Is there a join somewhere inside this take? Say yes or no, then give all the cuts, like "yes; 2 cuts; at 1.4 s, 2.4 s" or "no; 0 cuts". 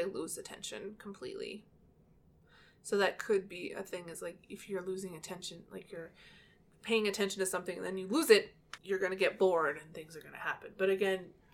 yes; 1 cut; at 8.8 s